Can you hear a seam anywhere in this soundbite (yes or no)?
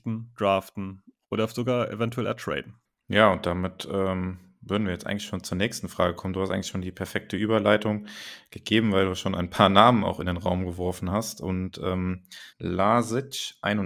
yes